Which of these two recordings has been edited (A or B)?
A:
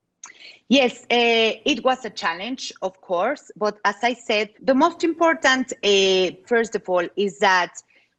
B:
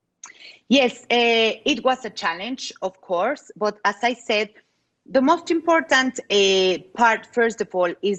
A